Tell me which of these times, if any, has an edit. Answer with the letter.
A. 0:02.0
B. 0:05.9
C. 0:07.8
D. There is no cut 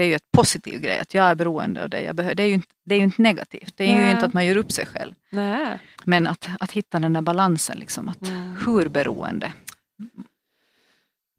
B